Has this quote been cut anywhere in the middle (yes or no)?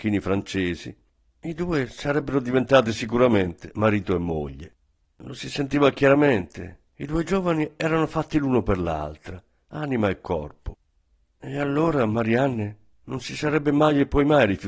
no